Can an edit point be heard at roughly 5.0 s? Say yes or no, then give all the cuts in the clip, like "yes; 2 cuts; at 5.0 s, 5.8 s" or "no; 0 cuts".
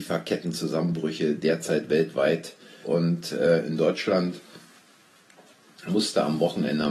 no; 1 cut; at 2.8 s